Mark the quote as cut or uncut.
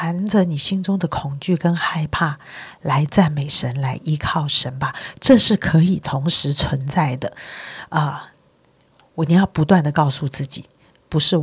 uncut